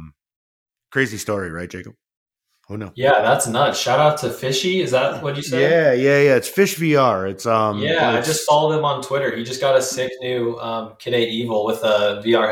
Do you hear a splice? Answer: no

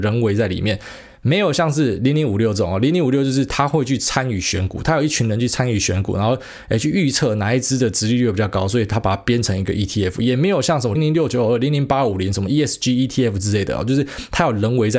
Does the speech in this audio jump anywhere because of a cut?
yes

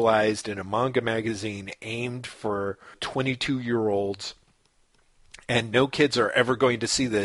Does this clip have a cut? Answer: yes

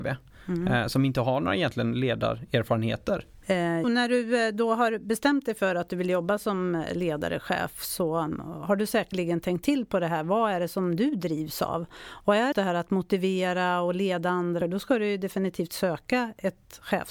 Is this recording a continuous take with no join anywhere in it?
no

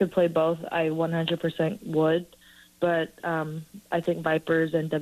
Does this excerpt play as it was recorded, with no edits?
yes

